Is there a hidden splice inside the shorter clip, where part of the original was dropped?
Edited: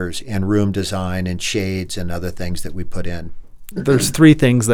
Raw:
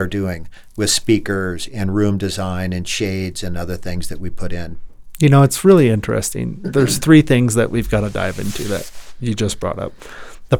yes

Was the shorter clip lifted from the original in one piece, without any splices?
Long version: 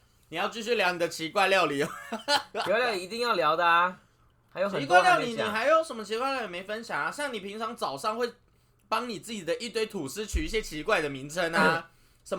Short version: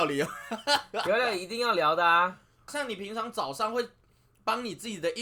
no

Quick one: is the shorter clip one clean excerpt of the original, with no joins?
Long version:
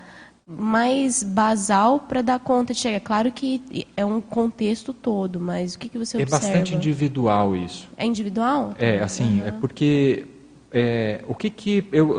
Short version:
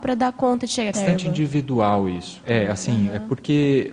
no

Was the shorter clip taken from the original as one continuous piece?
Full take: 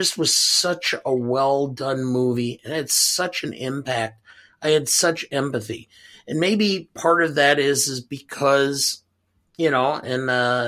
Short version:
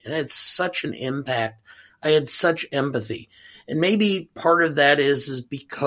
yes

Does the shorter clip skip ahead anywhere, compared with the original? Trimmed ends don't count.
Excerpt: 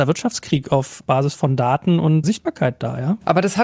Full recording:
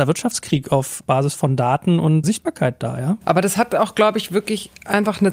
no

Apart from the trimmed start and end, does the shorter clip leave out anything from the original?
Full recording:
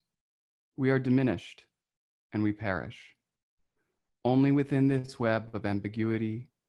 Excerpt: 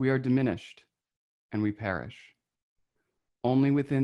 no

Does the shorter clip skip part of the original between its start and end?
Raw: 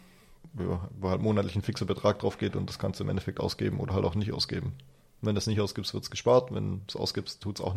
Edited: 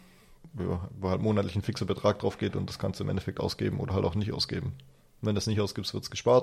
no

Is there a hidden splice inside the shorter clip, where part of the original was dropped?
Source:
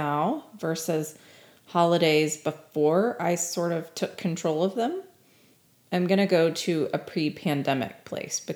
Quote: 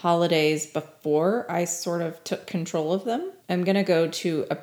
yes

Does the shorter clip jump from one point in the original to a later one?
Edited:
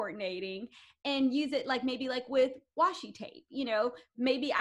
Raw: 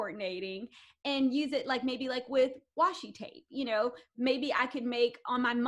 no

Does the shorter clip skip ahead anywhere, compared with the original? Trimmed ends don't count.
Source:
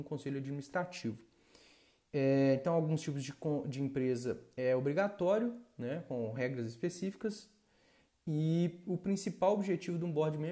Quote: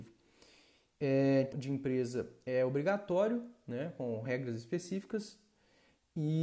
yes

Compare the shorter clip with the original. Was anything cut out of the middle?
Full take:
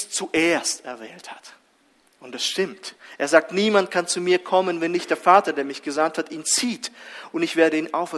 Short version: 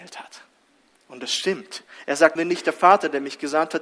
yes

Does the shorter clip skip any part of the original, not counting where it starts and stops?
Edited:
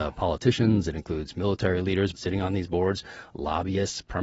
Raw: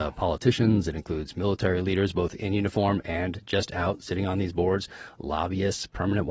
yes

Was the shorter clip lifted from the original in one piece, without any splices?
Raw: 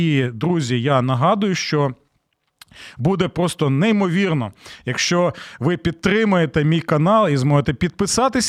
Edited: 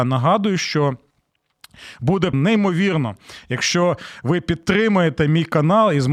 no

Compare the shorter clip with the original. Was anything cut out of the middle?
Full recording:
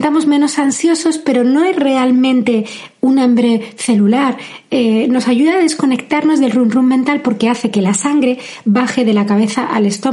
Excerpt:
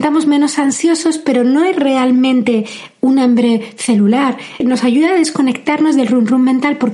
yes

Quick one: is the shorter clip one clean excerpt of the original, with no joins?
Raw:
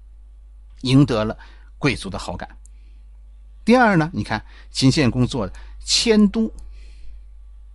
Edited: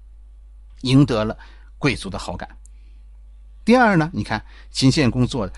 yes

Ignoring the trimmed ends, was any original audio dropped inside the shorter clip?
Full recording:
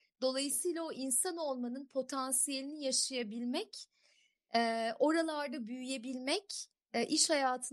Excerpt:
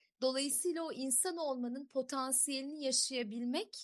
no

